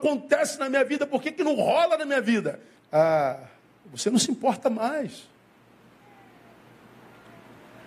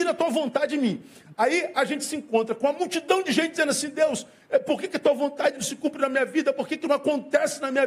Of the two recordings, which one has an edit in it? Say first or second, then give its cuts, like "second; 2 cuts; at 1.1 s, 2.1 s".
first; 1 cut; at 2.8 s